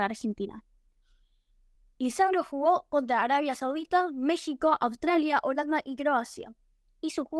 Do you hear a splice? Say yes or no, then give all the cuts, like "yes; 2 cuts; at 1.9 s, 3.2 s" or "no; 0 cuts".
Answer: no; 0 cuts